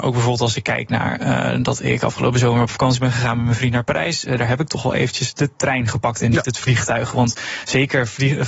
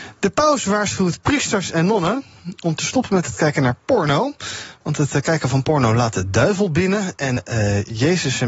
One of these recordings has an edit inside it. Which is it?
second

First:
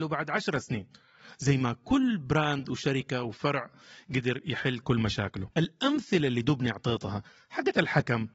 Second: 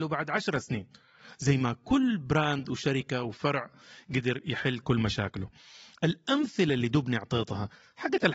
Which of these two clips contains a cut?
first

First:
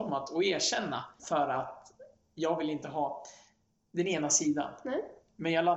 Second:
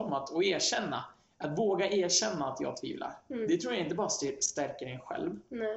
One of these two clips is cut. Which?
first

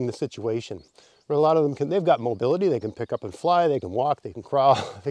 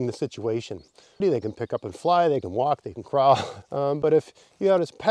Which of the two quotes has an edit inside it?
second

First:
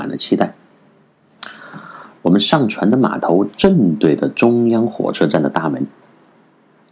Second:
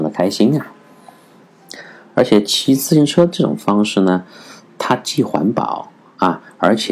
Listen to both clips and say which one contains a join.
first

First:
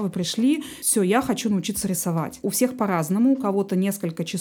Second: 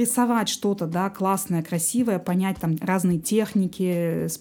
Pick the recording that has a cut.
first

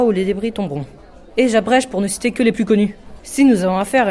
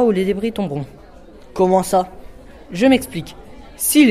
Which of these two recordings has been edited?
first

